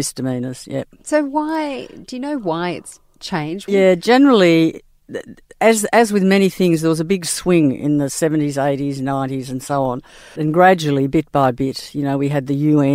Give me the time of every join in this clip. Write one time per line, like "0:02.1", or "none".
0:03.7
0:10.4